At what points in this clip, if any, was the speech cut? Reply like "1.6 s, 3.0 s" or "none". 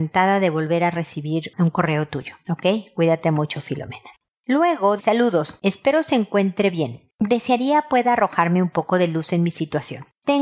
5.0 s

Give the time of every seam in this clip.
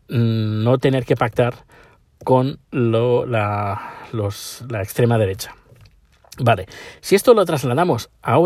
none

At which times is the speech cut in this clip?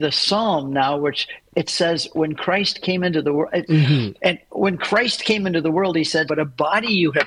3.7 s, 6.3 s

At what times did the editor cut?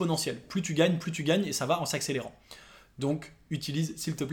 none

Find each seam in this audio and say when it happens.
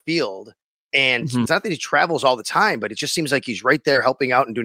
1.5 s

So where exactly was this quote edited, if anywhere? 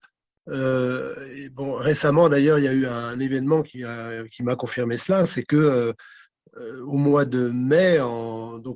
none

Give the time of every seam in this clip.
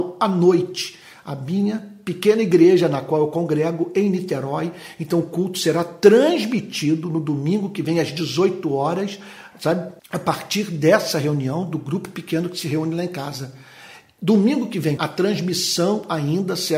10.0 s, 15.0 s

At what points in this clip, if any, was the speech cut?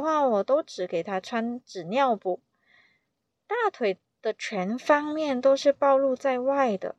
none

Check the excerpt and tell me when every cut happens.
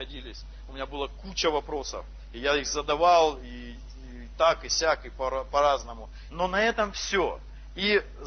6.3 s

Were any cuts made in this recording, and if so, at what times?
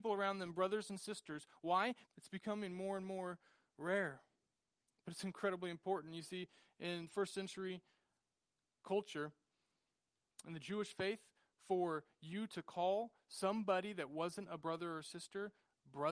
2.1 s

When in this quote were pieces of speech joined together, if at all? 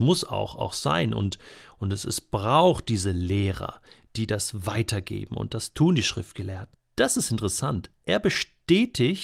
6.7 s

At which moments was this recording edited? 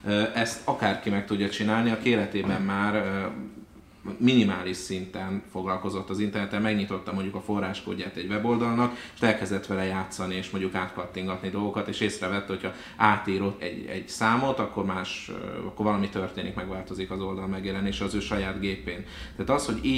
13.6 s

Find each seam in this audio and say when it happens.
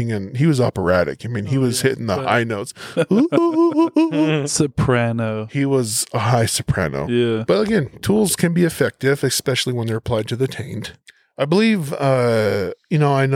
none

